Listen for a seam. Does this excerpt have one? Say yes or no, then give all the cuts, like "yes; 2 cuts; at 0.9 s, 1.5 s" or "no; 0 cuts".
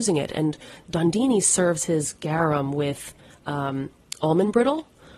no; 0 cuts